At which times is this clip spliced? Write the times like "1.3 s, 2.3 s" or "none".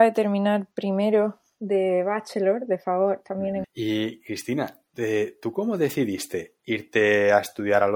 3.6 s